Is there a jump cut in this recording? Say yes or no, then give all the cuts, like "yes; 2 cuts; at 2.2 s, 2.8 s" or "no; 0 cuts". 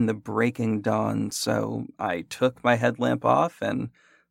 no; 0 cuts